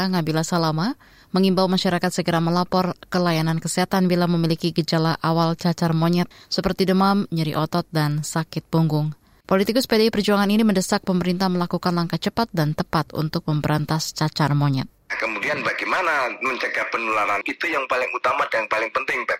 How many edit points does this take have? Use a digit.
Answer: 2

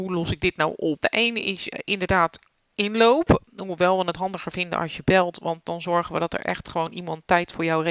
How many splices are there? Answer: 1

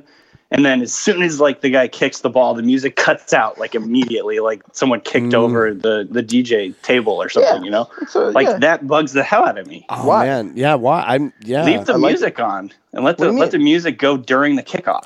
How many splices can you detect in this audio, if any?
1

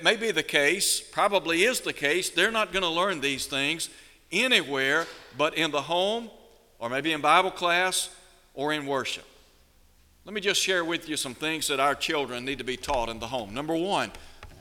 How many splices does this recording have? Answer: 0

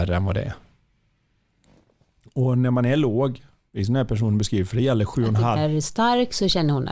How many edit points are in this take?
1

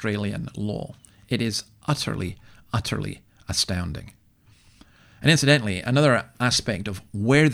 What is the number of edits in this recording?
0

